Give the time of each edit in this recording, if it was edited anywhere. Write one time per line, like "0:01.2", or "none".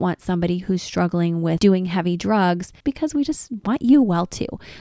0:01.6
0:02.8